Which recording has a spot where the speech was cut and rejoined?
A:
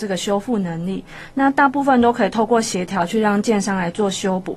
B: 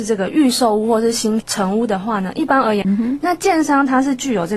B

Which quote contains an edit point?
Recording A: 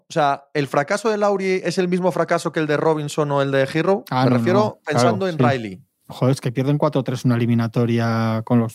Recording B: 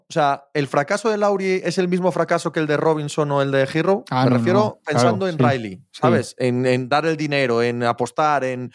A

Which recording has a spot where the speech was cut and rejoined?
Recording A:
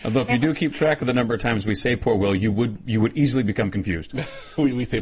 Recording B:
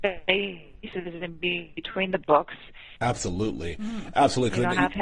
B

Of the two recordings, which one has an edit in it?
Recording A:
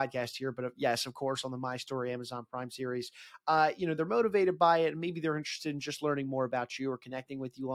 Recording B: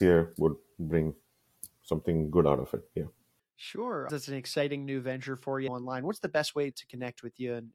B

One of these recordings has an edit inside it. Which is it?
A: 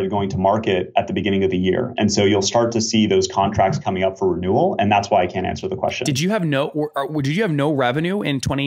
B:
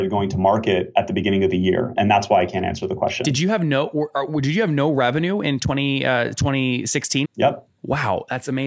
B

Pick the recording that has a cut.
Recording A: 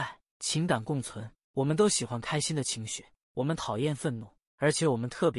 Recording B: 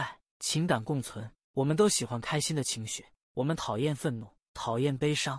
A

